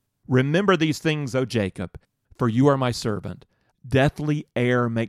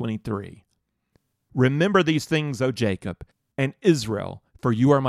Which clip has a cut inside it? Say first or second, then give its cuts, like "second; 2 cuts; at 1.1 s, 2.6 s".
first; 2 cuts; at 2.2 s, 3.7 s